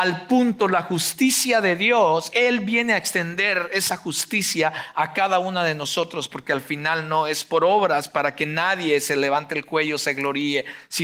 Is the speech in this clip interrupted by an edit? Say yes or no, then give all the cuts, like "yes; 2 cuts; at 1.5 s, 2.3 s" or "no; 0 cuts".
yes; 1 cut; at 2.3 s